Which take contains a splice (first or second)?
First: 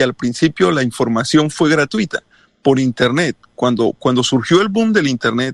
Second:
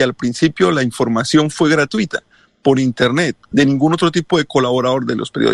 second